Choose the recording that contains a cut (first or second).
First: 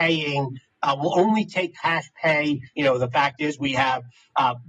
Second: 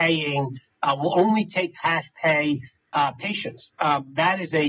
first